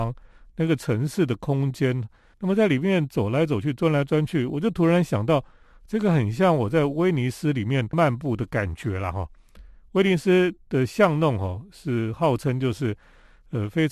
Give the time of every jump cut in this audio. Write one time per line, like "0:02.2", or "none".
0:02.3